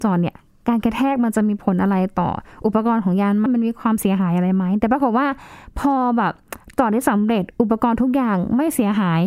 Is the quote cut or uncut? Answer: cut